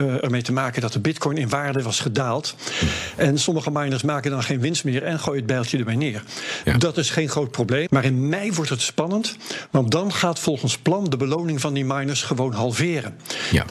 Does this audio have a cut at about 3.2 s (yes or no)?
no